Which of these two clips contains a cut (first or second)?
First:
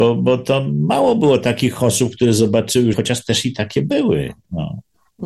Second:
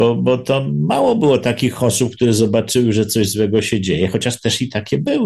first